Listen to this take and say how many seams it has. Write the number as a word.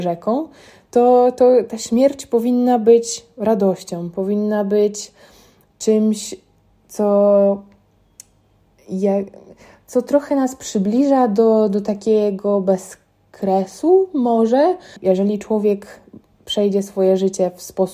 one